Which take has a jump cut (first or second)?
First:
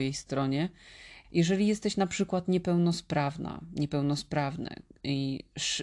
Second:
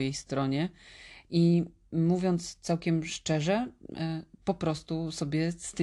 first